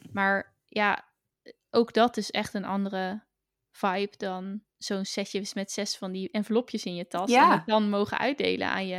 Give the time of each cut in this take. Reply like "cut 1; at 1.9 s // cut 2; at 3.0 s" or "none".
cut 1; at 4.7 s